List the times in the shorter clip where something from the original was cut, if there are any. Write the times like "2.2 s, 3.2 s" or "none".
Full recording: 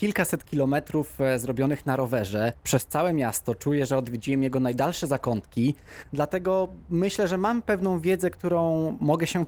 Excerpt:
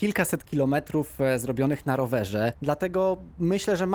2.6 s